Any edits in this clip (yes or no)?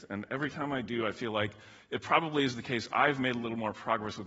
no